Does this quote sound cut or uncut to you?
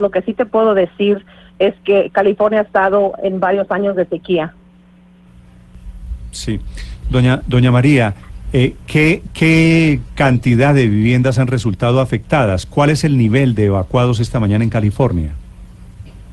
uncut